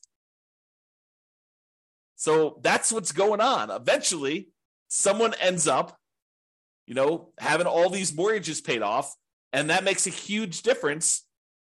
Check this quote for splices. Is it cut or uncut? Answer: uncut